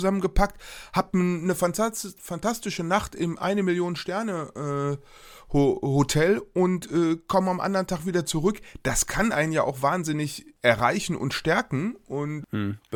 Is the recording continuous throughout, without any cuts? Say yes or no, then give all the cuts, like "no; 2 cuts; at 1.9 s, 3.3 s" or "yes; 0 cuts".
yes; 0 cuts